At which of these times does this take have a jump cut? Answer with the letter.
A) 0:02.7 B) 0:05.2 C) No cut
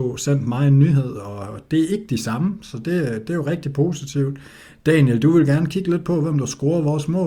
C